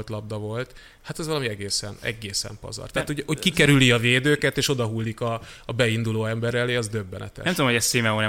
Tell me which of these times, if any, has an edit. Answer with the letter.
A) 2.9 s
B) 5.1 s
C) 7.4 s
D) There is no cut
D